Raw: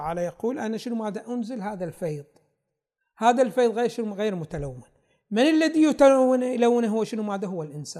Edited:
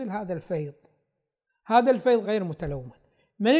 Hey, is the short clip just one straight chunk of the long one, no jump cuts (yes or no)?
no